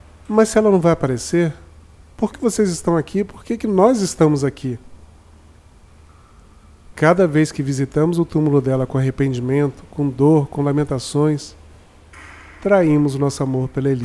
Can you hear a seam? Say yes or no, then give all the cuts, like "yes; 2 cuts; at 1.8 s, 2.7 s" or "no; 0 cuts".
yes; 2 cuts; at 2.3 s, 6.9 s